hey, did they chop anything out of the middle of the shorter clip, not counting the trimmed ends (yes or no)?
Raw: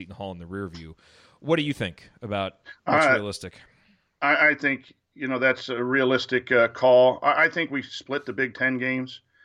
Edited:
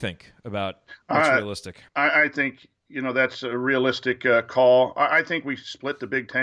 yes